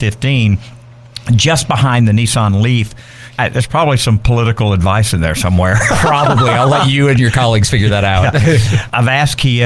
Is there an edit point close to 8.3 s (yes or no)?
no